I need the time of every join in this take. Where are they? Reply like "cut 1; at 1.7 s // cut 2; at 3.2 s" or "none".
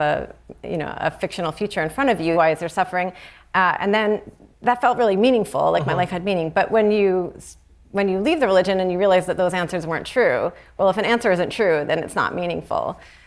cut 1; at 2.3 s